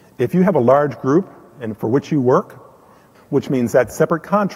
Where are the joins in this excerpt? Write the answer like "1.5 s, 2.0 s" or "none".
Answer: 3.1 s